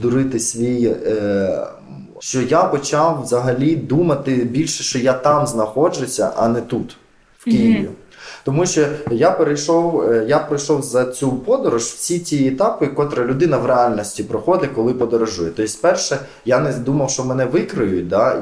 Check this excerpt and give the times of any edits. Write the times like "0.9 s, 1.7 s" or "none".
2.2 s